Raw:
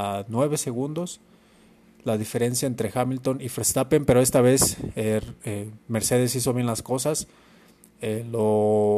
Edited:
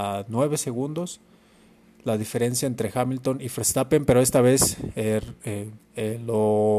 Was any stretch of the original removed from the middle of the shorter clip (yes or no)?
yes